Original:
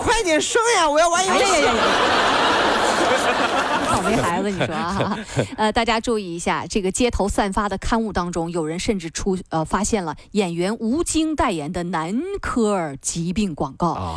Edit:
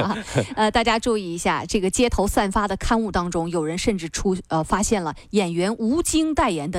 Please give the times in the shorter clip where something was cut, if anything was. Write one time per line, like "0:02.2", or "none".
none

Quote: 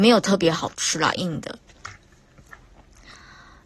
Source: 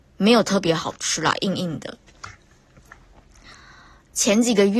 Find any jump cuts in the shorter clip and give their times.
0:01.2

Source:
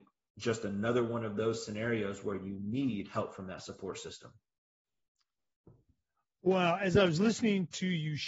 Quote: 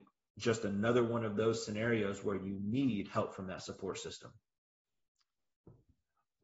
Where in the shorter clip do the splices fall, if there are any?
none

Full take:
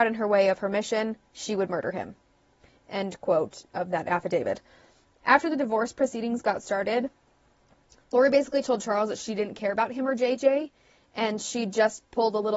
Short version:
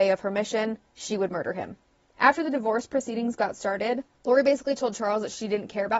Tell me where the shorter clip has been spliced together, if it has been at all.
0:02.1
0:04.1

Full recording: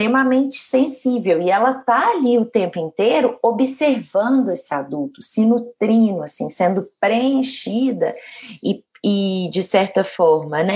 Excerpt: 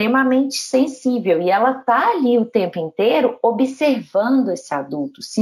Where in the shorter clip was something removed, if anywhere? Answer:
none

